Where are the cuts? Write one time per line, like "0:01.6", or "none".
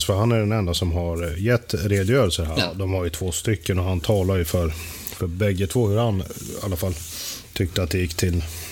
0:02.6